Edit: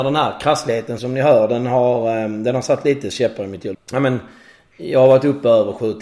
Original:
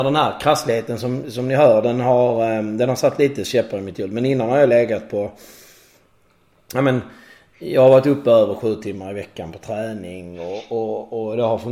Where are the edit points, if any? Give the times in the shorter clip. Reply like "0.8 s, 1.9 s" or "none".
1.0 s, 3.7 s